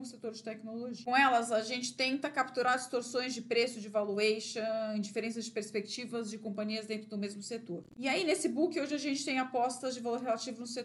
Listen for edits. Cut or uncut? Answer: cut